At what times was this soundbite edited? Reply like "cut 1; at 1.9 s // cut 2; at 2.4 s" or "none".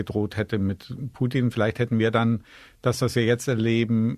none

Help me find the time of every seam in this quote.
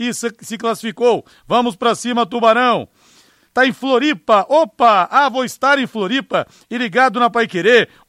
cut 1; at 3.5 s

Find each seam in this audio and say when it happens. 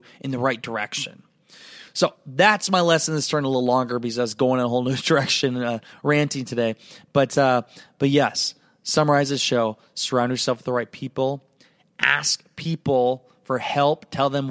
none

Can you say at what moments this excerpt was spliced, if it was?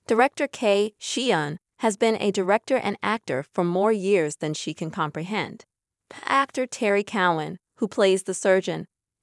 cut 1; at 5.9 s

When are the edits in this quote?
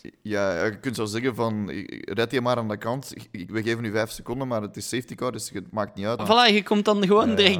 cut 1; at 6.2 s

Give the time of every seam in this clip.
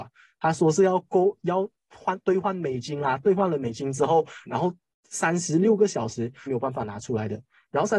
cut 1; at 4.5 s // cut 2; at 6.5 s

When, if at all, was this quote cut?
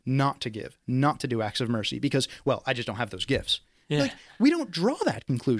none

